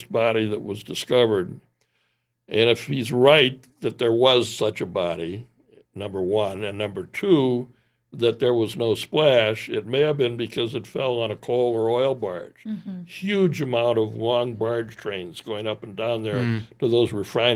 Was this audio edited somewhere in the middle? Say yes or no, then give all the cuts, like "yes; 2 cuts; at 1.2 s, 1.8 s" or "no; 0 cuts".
no; 0 cuts